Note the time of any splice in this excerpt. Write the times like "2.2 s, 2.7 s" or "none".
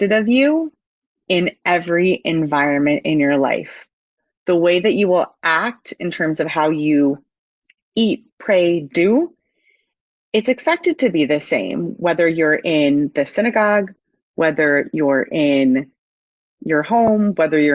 none